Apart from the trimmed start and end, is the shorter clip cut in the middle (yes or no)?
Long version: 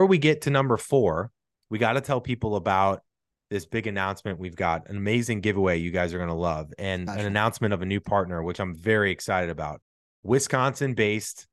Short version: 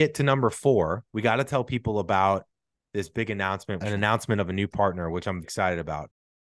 yes